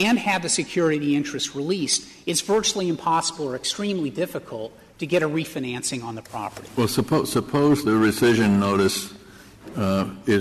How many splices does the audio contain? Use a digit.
0